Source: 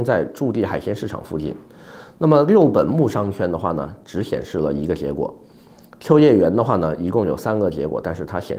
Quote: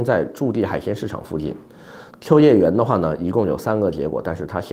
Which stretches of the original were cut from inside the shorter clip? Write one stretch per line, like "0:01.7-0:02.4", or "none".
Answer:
0:02.1-0:05.9